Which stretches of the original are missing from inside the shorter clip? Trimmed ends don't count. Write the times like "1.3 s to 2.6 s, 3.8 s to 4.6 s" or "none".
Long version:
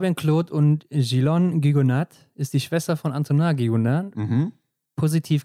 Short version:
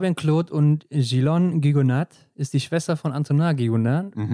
none